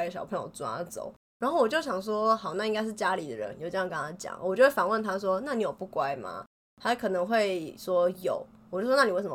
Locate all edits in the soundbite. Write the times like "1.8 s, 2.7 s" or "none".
none